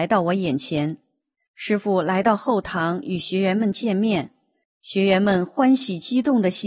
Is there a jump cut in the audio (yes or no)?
yes